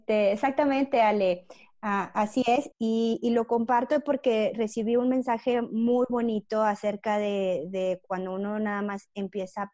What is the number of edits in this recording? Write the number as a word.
one